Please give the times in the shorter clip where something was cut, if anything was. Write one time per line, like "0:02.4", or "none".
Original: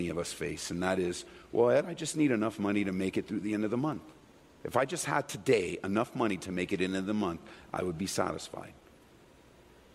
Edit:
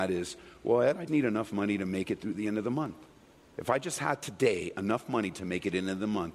0:01.1